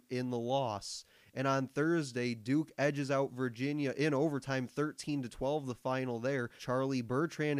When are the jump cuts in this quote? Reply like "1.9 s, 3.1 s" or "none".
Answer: 6.6 s